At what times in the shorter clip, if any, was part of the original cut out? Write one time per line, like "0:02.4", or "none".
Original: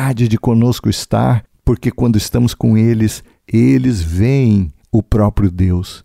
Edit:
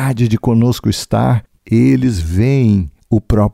0:01.6